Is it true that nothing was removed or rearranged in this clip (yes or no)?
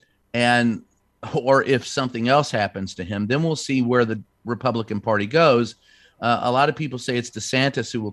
yes